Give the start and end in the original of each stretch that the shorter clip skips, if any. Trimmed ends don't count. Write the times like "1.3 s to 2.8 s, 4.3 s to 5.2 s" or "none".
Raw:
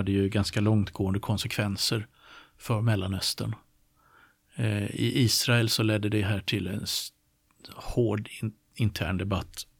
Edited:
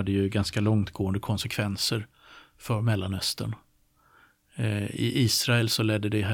none